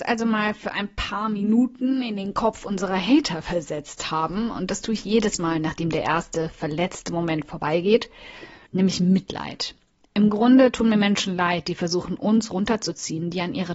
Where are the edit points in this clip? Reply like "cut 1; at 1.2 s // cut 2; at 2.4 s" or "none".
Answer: cut 1; at 8.7 s